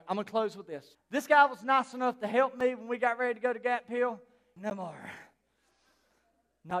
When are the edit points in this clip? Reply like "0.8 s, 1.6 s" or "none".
0.9 s, 4.6 s